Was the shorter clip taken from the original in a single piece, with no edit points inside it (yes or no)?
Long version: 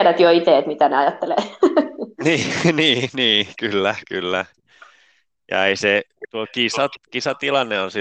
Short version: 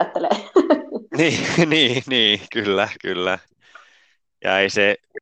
yes